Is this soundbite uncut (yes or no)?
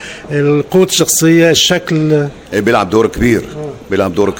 no